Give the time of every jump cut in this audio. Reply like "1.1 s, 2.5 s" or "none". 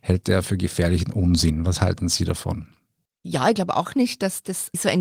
none